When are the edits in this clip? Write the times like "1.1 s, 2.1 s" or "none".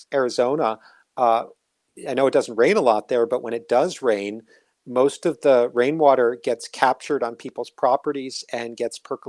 none